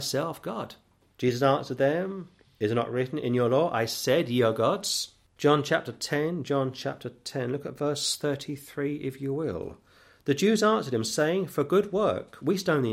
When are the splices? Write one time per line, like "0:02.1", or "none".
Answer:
0:05.3